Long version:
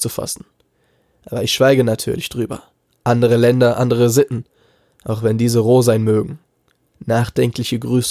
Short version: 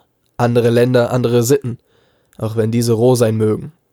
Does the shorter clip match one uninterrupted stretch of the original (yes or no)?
yes